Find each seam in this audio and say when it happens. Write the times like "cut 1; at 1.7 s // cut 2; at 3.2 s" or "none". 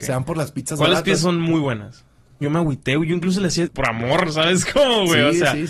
cut 1; at 2.4 s // cut 2; at 3.7 s